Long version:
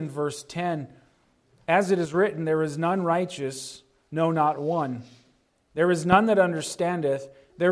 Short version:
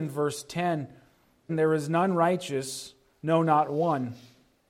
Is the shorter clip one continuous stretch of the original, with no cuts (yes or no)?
no